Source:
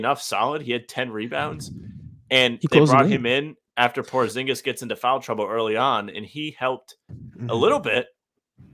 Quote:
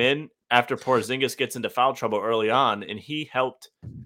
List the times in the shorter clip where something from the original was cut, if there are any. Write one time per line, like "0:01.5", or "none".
none